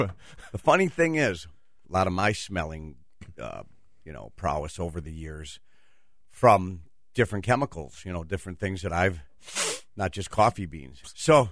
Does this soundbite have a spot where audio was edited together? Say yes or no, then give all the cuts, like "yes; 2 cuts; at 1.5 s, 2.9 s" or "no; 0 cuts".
yes; 1 cut; at 1.8 s